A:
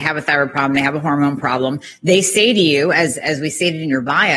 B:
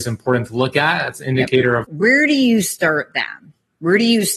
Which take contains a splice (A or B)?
B